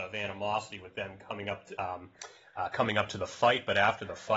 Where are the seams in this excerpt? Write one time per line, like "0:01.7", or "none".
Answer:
none